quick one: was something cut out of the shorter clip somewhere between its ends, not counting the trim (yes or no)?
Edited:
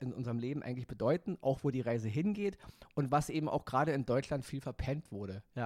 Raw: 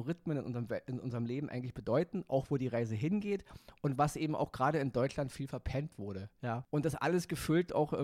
no